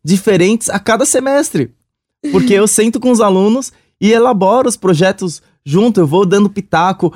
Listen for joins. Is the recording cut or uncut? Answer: uncut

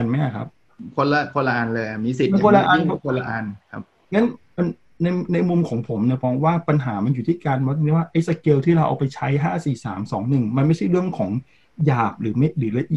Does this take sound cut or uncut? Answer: cut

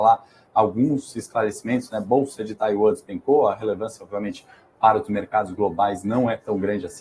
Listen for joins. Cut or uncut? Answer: uncut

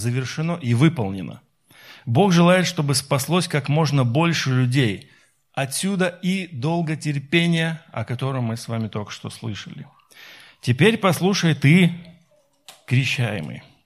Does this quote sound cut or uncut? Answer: uncut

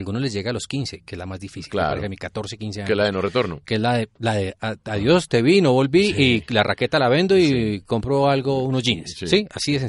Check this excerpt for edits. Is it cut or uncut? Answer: uncut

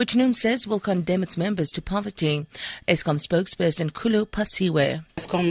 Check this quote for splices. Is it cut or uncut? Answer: cut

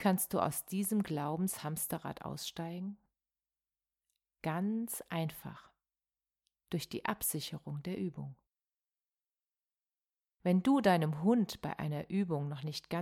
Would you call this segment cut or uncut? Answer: uncut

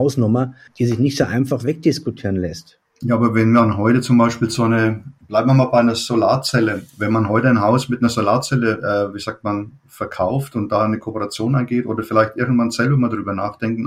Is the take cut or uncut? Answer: uncut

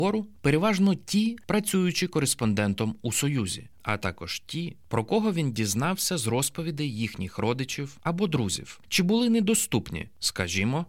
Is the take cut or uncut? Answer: cut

